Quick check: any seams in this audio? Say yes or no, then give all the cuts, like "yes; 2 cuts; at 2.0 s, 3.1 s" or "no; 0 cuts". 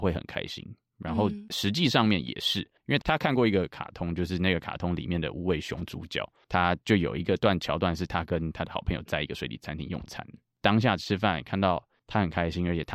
yes; 2 cuts; at 3.0 s, 10.3 s